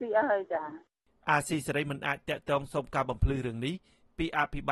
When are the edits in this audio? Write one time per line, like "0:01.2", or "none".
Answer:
none